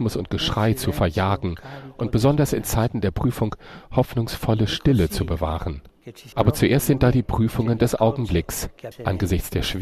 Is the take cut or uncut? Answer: cut